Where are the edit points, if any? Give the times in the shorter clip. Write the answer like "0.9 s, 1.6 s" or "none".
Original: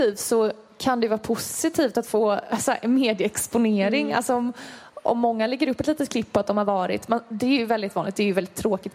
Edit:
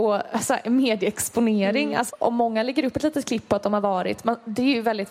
2.1 s